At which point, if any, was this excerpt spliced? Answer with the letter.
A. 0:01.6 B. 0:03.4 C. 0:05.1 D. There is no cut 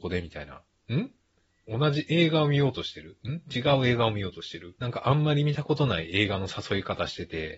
D